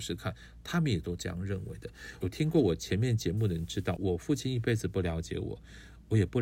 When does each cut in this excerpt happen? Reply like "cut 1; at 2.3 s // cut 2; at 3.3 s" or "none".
cut 1; at 2.2 s // cut 2; at 4.0 s

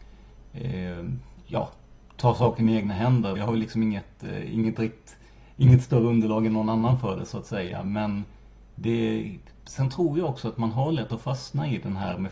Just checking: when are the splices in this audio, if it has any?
cut 1; at 3.4 s

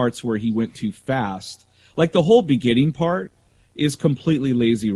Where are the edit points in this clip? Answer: none

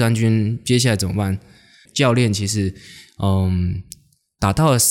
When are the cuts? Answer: cut 1; at 1.9 s

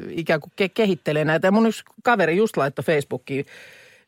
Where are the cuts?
none

